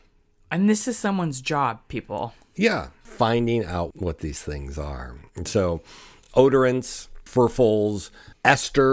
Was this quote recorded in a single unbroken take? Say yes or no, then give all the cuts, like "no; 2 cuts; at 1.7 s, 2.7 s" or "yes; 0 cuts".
yes; 0 cuts